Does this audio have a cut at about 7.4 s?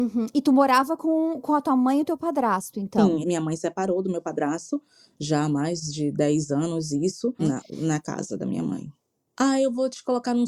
yes; 3 cuts; at 3.2 s, 7.4 s, 9.3 s

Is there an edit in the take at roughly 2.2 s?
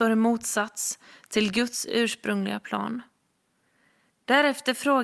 no; 1 cut; at 4.1 s

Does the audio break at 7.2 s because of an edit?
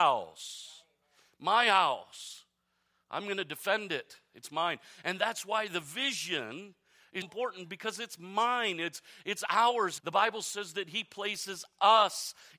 yes; 2 cuts; at 7.2 s, 10.0 s

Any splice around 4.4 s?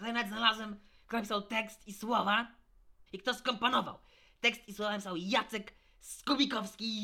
no; 1 cut; at 3.1 s

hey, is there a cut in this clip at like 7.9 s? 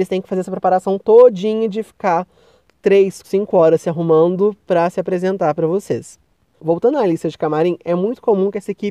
no; 1 cut; at 3.2 s

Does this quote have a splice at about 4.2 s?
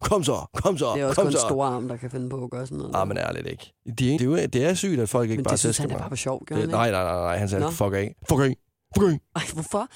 yes; 1 cut; at 4.2 s

